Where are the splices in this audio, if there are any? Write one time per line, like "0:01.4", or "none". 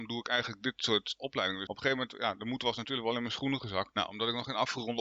0:01.7
0:03.9